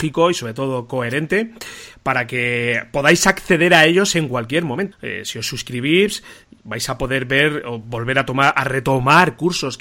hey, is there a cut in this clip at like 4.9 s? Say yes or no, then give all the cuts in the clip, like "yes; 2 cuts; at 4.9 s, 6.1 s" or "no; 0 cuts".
yes; 1 cut; at 4.9 s